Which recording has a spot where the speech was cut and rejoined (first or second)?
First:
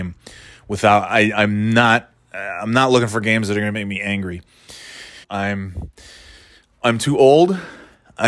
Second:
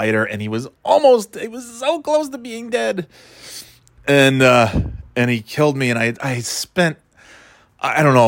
first